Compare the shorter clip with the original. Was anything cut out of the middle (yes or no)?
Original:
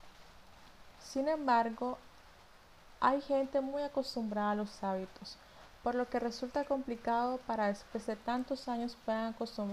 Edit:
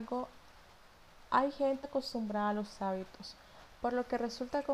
yes